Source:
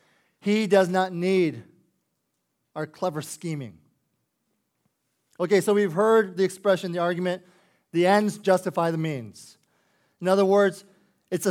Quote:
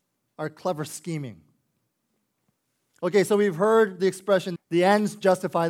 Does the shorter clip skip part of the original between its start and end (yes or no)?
yes